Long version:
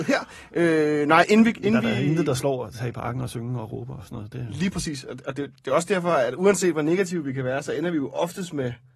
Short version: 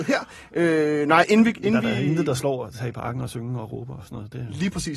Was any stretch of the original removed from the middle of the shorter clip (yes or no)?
no